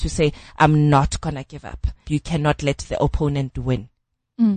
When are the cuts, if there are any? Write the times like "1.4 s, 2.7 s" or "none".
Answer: 2.0 s